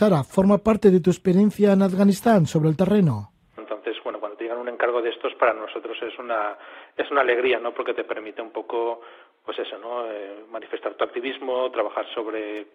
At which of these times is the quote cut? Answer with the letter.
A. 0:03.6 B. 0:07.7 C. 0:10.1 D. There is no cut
A